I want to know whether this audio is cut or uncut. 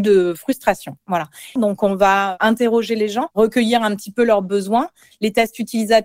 cut